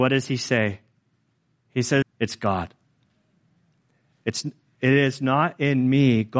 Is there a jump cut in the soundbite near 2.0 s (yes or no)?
yes